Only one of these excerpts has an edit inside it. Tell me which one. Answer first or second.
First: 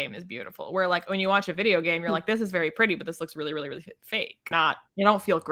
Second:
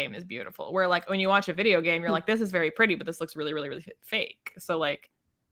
first